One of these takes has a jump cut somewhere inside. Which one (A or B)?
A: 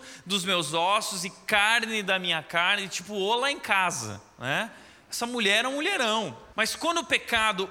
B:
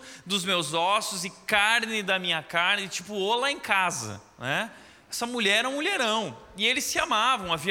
A